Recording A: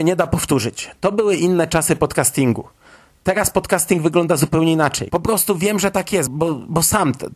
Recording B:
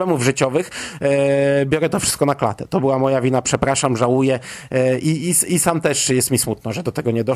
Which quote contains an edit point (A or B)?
A